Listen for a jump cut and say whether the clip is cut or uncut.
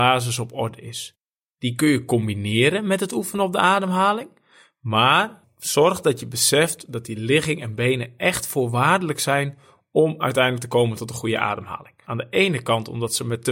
cut